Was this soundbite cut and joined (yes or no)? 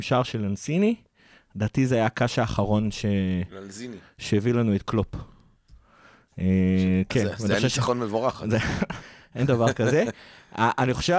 yes